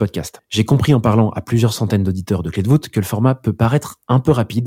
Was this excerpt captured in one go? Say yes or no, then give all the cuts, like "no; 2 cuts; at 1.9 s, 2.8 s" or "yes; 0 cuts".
yes; 0 cuts